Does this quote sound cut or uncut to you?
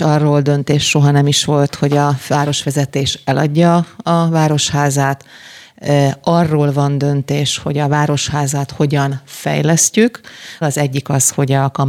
cut